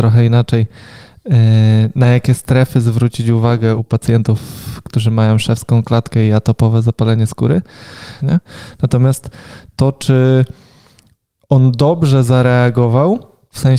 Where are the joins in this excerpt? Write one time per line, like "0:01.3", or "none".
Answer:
0:03.8
0:08.2